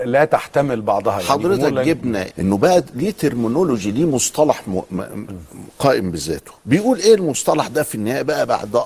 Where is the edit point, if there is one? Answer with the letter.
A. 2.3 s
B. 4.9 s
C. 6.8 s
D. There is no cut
A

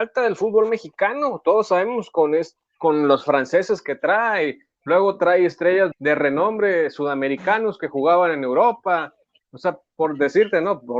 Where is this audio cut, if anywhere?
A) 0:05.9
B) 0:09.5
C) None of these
A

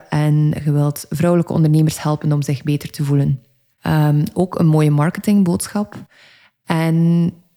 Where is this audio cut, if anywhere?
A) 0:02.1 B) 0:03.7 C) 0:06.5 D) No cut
B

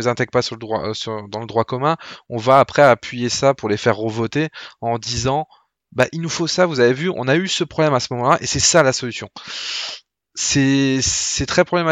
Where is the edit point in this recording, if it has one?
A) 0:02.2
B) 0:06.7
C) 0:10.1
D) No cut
D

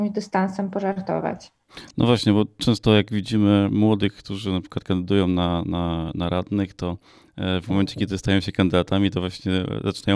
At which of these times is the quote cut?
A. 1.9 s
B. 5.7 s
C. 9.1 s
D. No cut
D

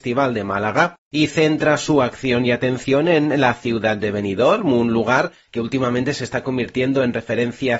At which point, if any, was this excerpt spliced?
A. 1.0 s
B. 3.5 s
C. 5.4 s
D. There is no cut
D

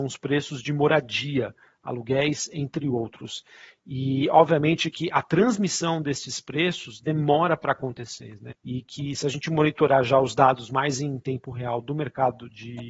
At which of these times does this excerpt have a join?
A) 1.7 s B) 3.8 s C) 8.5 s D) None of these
C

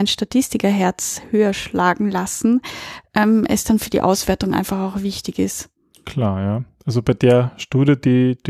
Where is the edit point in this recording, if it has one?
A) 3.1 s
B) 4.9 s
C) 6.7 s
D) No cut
D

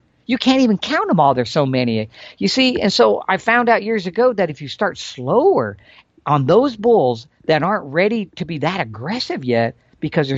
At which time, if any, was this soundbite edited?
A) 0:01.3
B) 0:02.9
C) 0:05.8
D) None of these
D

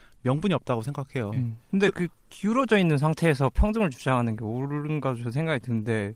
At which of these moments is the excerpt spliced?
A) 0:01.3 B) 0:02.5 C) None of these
A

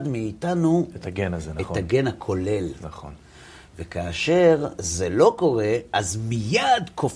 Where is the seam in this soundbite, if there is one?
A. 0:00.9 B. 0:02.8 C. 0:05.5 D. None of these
D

